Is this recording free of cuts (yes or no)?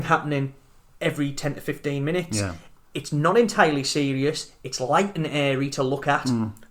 yes